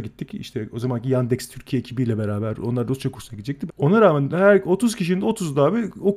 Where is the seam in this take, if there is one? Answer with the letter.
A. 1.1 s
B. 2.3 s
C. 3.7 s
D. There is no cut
C